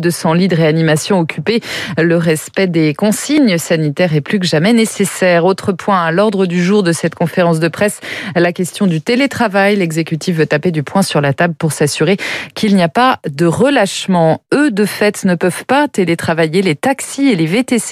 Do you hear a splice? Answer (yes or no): no